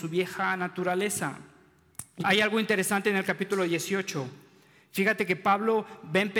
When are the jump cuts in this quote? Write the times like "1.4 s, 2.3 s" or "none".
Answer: 2.2 s